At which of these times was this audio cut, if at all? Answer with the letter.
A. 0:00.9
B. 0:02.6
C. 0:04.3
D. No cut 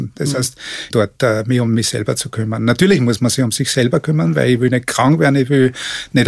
A